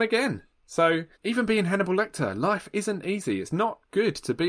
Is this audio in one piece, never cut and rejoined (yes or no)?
no